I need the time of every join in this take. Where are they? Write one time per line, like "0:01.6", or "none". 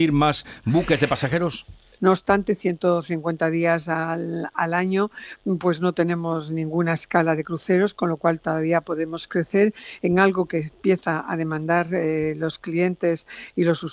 0:02.0